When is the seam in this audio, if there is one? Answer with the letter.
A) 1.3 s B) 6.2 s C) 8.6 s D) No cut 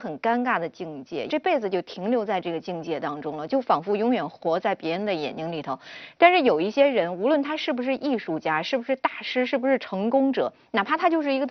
A